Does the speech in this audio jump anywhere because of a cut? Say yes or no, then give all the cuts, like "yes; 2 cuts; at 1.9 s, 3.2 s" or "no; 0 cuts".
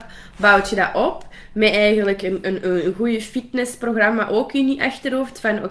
no; 0 cuts